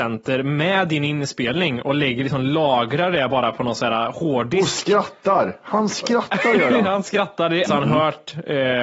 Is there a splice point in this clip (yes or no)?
yes